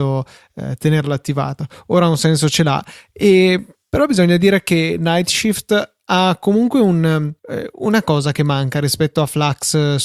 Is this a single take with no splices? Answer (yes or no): no